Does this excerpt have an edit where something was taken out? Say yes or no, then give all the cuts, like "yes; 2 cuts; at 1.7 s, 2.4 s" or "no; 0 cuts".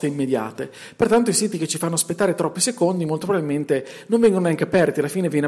no; 0 cuts